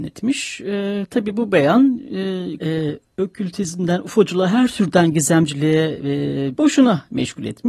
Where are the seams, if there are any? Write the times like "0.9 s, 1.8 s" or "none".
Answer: 2.6 s, 6.6 s